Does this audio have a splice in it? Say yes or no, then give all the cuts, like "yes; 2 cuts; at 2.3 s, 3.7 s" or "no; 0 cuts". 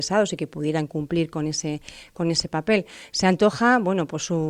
no; 0 cuts